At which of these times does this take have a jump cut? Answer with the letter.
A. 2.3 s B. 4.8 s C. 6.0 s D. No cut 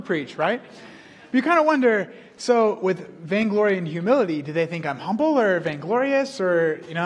D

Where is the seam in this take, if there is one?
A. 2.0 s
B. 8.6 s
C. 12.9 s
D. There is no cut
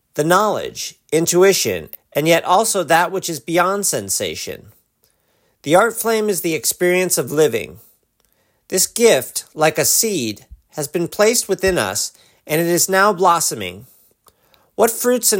A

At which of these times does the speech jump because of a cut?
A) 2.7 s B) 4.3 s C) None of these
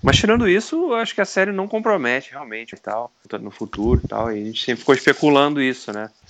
A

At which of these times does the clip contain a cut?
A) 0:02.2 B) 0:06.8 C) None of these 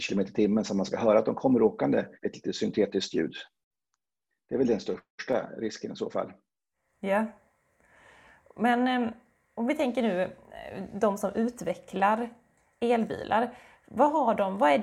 A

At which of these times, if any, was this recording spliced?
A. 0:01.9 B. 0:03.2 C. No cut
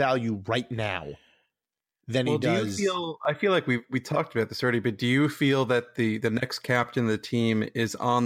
C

